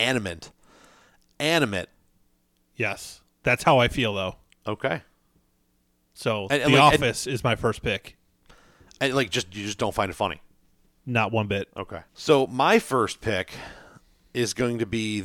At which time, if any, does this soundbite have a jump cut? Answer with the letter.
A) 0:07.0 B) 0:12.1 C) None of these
B